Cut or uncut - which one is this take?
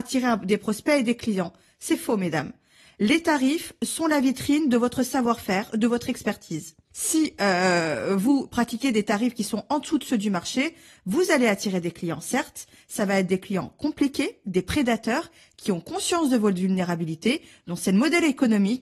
uncut